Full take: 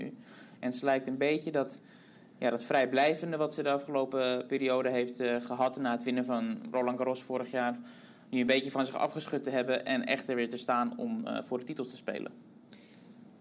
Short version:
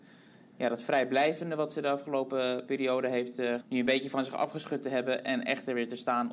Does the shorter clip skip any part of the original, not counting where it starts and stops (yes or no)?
yes